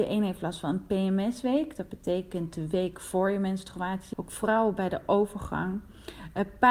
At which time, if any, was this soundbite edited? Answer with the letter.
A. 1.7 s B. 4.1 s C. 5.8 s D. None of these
B